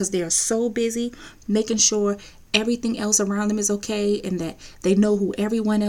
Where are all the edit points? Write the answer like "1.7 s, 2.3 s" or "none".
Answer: none